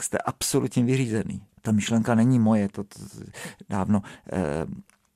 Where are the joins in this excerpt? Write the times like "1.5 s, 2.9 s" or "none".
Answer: 1.5 s